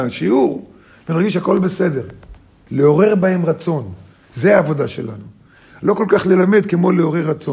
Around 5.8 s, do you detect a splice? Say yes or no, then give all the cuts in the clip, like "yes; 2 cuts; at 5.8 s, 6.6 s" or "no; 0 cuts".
no; 1 cut; at 2.7 s